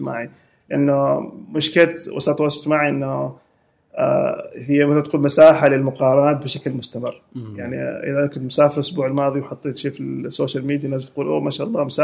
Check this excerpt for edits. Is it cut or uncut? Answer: uncut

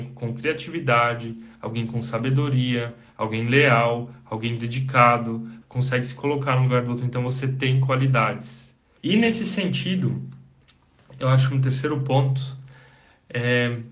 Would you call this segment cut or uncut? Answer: cut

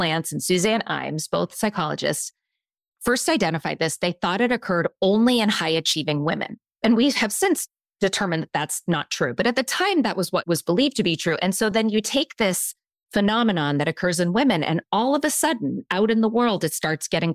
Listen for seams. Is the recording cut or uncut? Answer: uncut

